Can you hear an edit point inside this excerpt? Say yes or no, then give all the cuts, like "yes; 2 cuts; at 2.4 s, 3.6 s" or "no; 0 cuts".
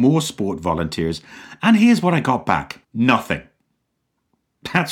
yes; 1 cut; at 2.8 s